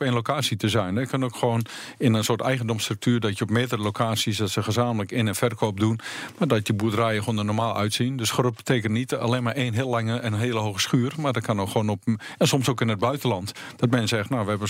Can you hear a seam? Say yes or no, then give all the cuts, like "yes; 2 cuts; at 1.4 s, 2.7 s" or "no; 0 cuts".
no; 0 cuts